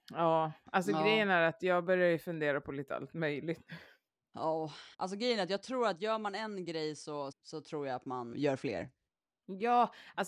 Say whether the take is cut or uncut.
cut